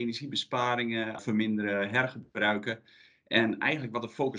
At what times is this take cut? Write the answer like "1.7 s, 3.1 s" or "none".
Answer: 1.2 s